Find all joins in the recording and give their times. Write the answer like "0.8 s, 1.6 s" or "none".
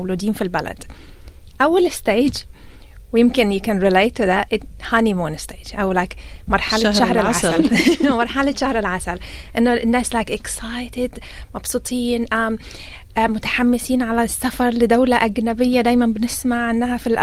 none